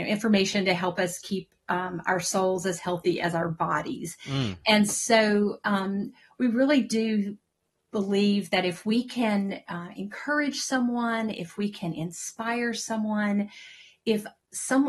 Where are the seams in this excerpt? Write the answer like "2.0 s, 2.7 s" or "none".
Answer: none